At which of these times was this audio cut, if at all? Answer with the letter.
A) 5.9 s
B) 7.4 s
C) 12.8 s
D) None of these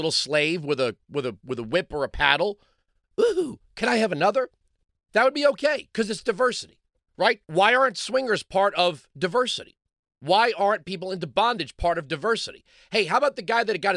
B